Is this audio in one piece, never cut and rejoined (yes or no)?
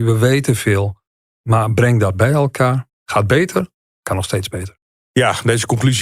yes